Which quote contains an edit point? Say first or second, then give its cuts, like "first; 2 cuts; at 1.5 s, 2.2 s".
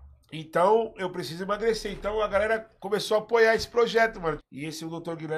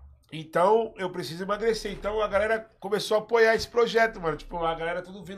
first; 1 cut; at 4.4 s